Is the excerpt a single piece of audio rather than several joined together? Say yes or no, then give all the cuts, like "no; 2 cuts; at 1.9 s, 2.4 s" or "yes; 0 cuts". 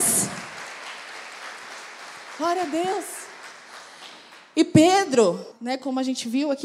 no; 1 cut; at 5.5 s